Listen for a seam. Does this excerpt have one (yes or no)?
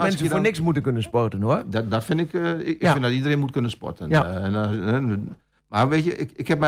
no